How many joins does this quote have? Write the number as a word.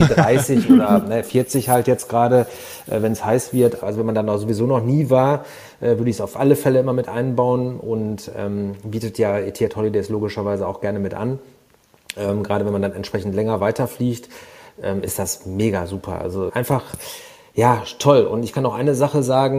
two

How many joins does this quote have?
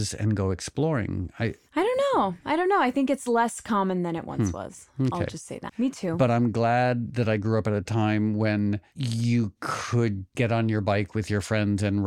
two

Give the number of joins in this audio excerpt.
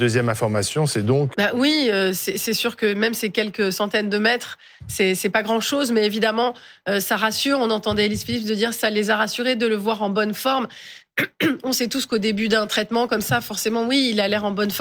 one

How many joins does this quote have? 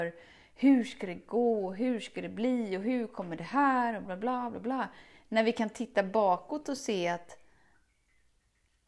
one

